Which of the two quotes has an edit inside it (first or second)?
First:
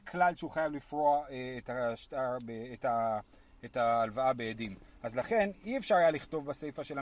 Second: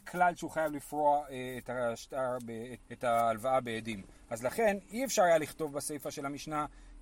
second